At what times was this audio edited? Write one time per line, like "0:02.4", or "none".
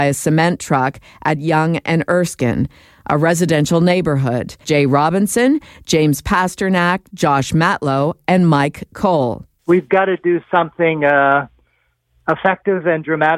0:04.6